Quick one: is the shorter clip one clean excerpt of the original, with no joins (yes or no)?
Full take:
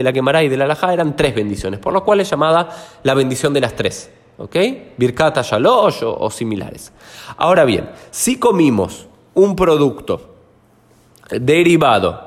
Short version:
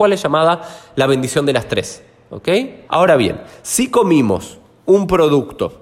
no